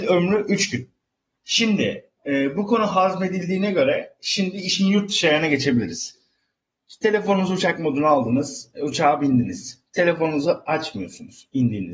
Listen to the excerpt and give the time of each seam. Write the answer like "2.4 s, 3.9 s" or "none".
1.3 s